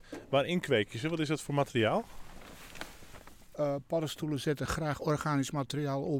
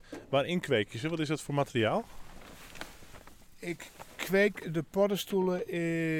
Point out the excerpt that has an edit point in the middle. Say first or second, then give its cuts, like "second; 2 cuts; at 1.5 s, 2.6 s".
first; 1 cut; at 3.5 s